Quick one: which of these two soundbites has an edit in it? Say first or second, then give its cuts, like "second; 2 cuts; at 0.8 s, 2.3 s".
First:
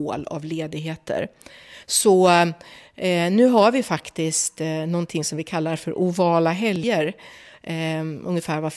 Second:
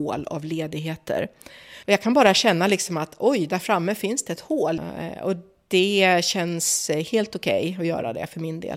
second; 2 cuts; at 1.8 s, 4.8 s